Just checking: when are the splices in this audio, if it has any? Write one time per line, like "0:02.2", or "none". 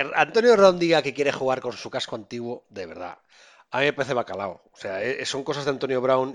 none